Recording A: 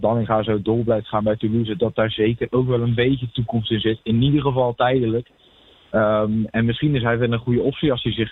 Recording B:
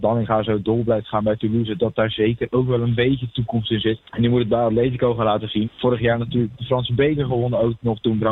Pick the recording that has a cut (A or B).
B